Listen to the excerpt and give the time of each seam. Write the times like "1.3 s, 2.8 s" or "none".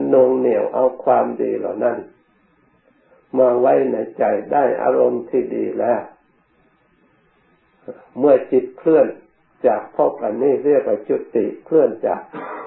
none